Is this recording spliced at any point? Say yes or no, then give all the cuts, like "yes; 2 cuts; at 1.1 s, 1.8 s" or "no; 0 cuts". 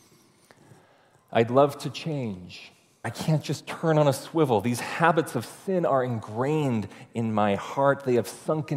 yes; 1 cut; at 3.0 s